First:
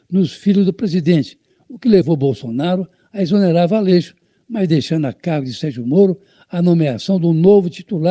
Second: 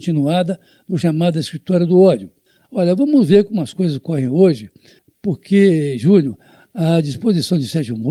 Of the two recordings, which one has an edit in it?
second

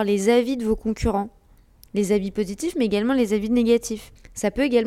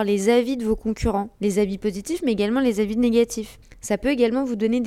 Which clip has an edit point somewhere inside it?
second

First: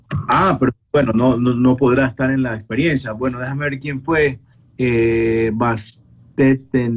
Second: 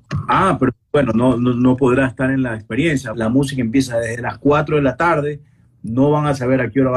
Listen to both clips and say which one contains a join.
second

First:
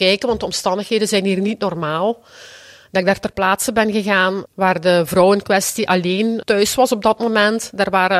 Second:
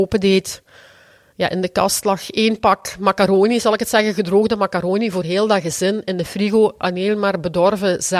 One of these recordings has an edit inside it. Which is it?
first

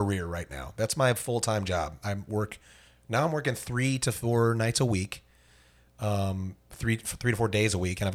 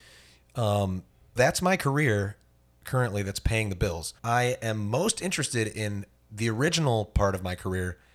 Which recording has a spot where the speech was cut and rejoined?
second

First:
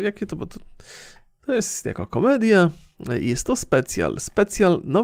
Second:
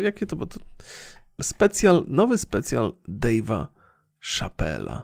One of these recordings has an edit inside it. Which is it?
second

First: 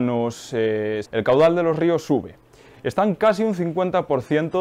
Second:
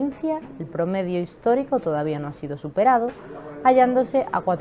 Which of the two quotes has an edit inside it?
first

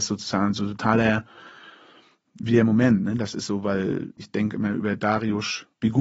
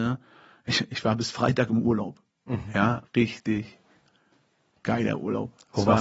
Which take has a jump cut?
second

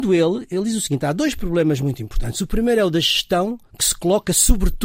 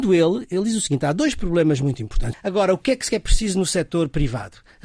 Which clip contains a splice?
second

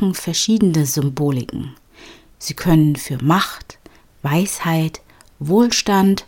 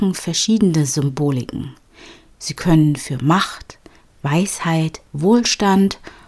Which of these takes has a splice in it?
second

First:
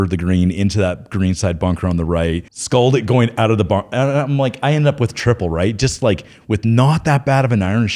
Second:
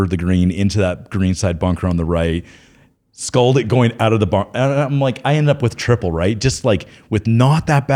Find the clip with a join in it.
first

